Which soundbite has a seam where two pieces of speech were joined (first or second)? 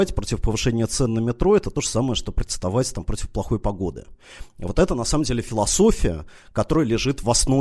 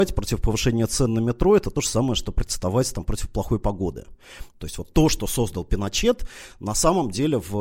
second